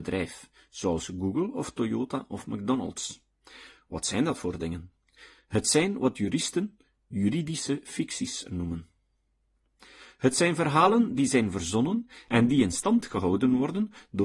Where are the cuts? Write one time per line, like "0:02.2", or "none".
none